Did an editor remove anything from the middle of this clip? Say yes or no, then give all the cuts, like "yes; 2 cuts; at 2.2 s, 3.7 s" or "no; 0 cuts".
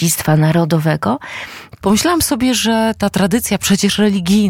yes; 1 cut; at 1.8 s